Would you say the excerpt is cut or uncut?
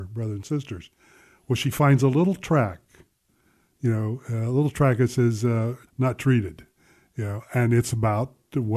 cut